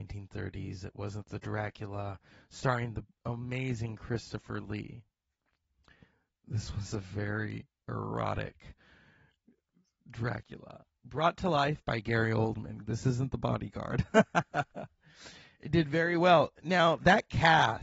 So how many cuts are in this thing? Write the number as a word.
one